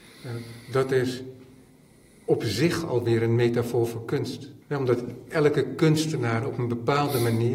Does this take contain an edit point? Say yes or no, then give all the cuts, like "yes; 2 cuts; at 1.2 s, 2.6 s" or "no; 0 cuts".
yes; 1 cut; at 4.6 s